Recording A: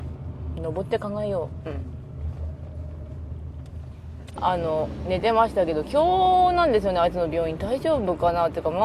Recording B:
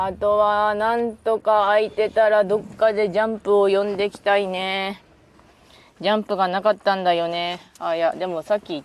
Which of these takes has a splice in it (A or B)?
A